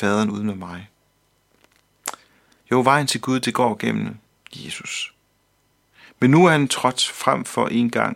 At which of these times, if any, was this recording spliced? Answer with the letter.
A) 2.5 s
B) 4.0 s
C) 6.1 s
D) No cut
C